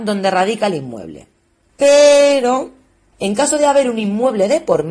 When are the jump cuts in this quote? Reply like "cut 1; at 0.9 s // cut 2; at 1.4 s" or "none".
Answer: cut 1; at 1.7 s // cut 2; at 3.1 s